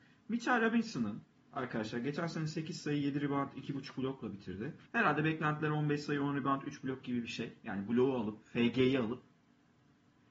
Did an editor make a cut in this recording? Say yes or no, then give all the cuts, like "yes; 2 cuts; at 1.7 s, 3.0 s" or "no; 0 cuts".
yes; 1 cut; at 4.9 s